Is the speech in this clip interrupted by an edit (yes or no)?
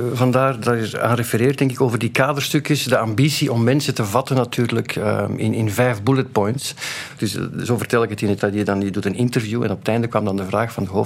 yes